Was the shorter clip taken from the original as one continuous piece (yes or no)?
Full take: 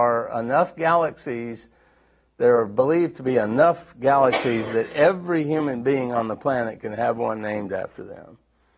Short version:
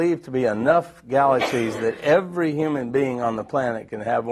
yes